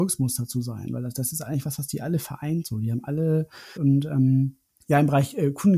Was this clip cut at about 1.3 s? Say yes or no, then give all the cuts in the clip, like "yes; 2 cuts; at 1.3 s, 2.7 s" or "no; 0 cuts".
no; 1 cut; at 3.8 s